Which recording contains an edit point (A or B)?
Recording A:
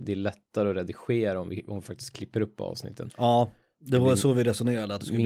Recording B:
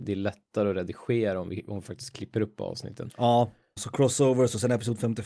B